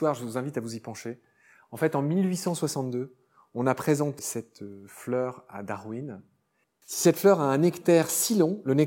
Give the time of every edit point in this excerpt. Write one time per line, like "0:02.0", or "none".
0:04.2
0:06.6